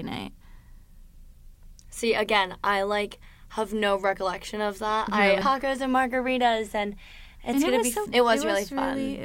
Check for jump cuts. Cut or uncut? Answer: cut